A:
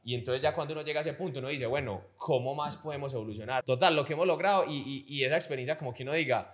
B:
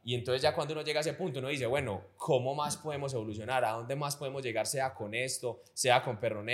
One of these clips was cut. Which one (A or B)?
A